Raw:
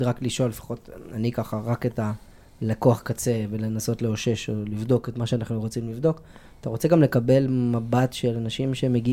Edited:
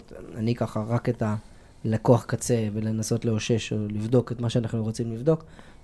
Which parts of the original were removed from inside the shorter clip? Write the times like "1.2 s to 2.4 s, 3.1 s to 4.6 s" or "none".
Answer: none